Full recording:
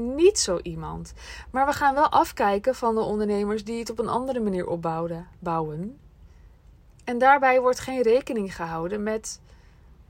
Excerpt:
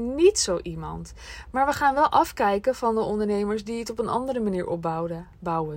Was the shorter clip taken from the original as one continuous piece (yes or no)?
yes